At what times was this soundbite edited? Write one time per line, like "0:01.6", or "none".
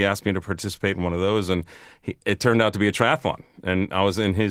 none